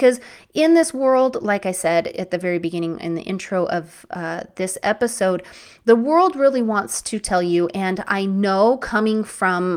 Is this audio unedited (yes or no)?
yes